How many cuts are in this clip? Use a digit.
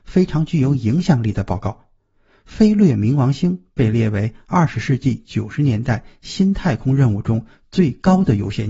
0